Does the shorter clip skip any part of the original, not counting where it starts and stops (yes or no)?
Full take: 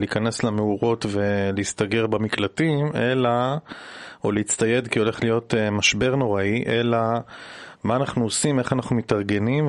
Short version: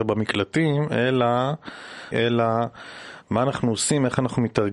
yes